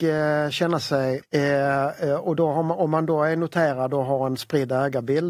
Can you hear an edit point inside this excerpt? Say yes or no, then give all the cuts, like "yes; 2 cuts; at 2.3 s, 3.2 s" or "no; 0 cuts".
yes; 1 cut; at 1.2 s